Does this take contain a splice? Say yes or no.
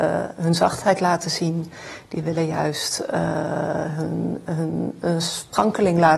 no